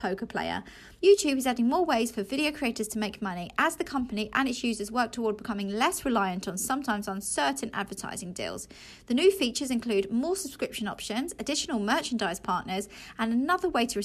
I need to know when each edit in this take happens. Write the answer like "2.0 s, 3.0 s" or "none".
1.0 s